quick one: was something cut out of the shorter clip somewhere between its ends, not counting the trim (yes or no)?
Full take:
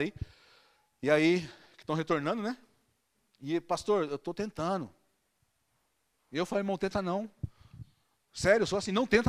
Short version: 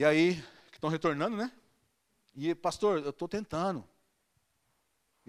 no